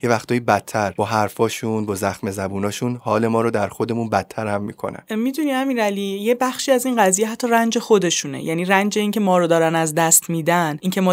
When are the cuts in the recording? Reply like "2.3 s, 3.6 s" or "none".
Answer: none